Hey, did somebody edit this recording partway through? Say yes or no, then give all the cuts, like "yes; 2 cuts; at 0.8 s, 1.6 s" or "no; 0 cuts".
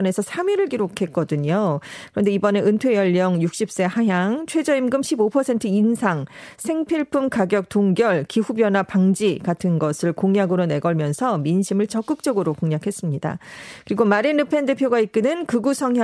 no; 0 cuts